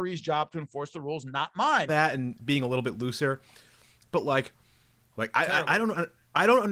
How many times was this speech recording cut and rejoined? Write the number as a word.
two